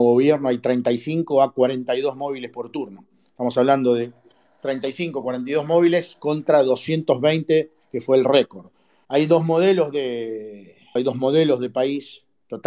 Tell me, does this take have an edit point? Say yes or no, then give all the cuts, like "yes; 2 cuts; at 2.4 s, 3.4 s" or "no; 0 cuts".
yes; 2 cuts; at 9.0 s, 11.0 s